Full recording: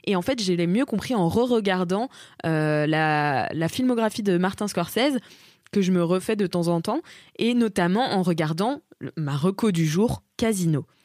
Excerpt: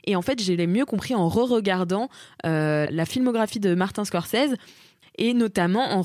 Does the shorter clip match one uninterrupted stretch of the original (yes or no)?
no